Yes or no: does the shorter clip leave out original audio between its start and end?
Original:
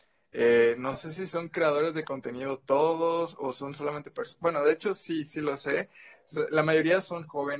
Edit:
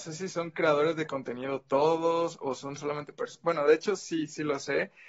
no